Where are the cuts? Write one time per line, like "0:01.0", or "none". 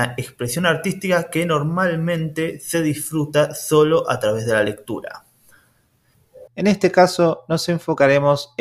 0:06.5